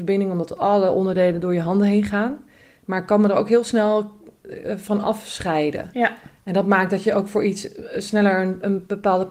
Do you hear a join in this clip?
no; 0 cuts

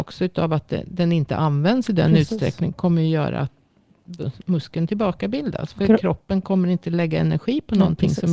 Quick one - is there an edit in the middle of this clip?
no; 0 cuts

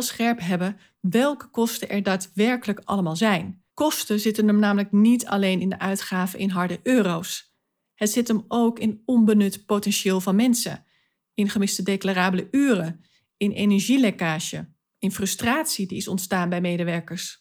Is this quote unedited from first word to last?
no; 1 cut; at 3.7 s

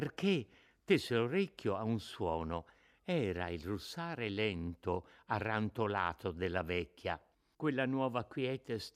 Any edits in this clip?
yes; 1 cut; at 7.5 s

